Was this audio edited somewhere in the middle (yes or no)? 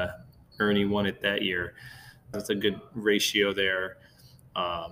yes